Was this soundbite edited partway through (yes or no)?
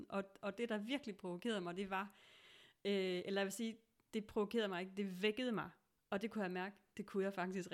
yes